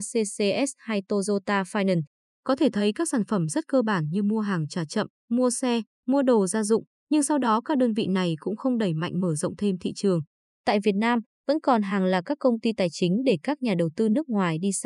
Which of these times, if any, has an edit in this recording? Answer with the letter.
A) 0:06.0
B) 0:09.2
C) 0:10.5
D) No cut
D